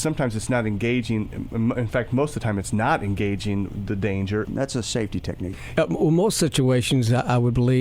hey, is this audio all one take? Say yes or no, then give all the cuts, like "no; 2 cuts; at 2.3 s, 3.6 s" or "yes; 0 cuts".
no; 2 cuts; at 4.4 s, 5.8 s